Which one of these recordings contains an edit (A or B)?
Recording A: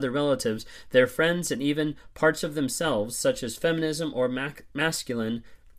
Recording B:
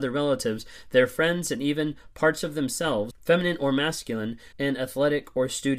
B